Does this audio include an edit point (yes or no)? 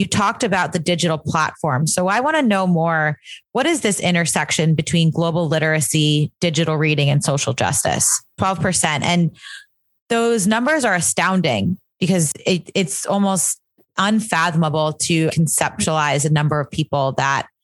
yes